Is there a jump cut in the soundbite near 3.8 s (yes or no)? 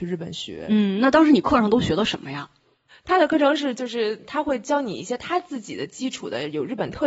no